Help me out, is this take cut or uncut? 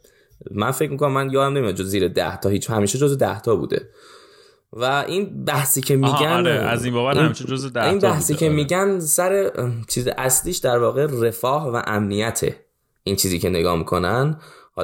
uncut